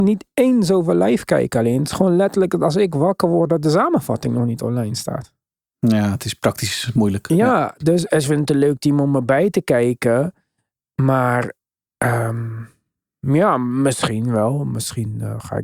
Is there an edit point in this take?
no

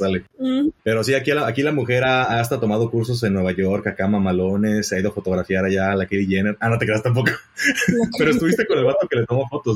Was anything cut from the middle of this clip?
no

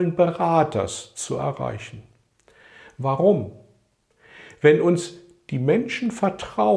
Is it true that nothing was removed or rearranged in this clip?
yes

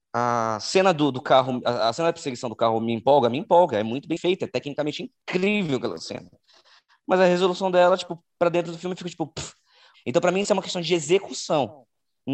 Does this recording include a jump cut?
yes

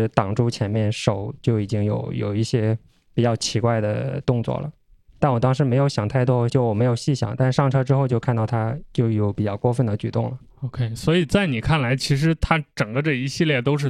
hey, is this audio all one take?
no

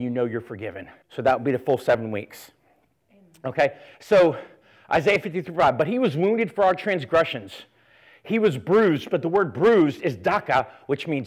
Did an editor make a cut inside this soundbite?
no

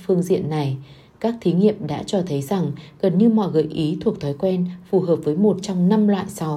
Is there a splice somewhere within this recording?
no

